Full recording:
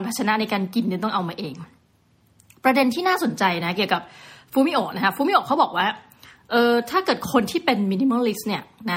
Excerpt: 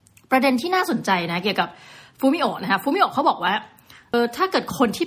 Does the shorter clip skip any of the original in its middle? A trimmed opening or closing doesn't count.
yes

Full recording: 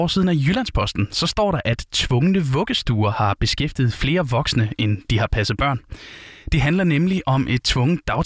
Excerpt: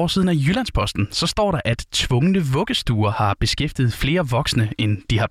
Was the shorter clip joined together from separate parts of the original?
no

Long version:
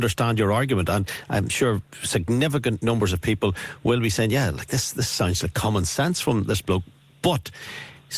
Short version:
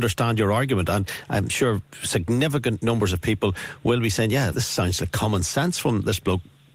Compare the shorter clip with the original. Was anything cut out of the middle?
yes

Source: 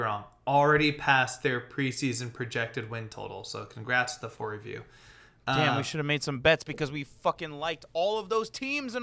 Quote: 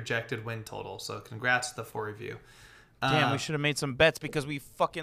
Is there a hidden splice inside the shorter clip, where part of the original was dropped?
no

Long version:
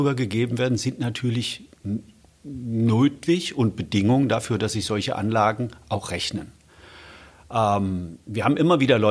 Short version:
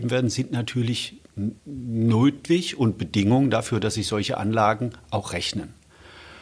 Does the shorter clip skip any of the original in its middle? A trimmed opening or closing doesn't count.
yes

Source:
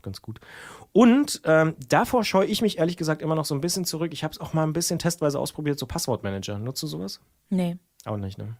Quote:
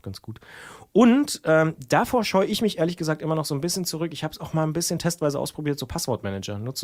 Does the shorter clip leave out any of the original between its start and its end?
no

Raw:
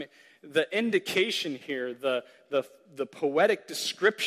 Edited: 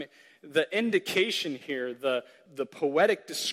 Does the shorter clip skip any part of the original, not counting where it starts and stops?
yes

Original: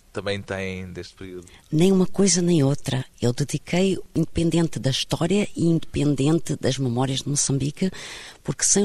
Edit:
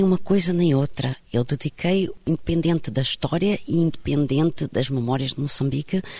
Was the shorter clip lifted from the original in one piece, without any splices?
yes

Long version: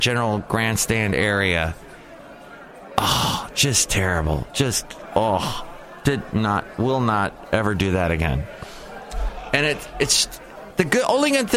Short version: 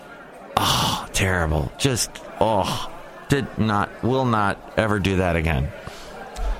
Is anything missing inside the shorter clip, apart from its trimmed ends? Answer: yes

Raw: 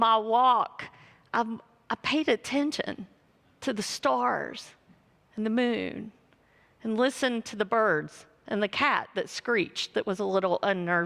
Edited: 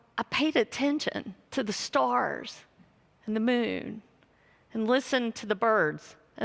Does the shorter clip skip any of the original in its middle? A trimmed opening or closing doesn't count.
yes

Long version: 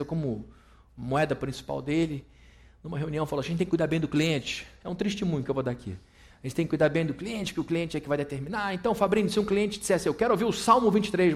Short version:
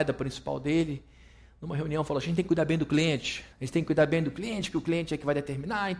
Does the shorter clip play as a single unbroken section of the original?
no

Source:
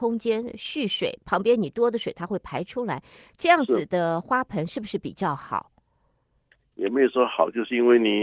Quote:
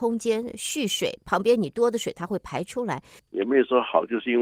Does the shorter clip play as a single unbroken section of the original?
no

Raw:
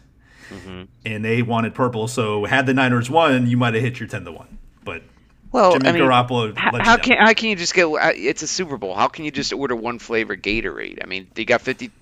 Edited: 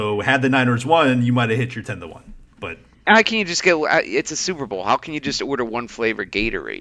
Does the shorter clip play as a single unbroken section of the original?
no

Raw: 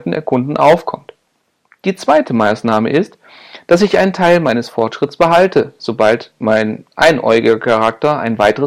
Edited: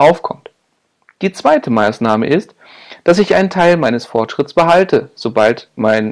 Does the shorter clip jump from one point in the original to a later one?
no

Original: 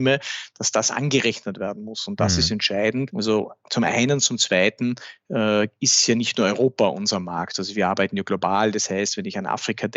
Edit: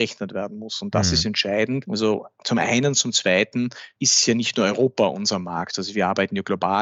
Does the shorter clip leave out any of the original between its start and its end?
yes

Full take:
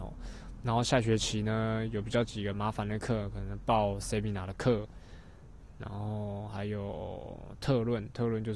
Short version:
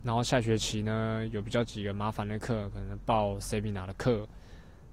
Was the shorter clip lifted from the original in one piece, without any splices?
yes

